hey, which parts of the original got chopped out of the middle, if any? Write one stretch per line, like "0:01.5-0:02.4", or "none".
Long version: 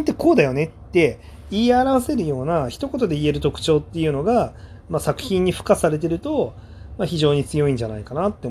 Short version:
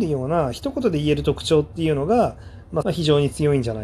0:05.0-0:07.0